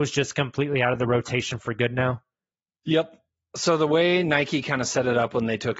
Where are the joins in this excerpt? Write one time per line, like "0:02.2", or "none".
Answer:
none